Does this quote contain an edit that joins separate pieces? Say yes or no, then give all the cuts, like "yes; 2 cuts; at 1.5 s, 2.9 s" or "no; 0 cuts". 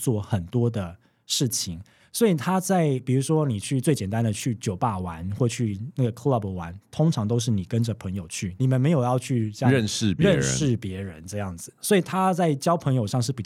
yes; 2 cuts; at 2.0 s, 8.6 s